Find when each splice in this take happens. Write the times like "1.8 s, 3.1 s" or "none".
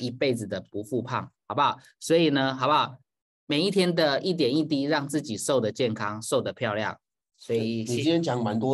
none